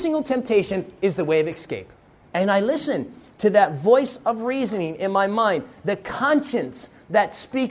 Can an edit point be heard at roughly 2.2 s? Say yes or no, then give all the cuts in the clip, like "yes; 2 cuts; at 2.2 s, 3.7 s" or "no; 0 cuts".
yes; 1 cut; at 2.2 s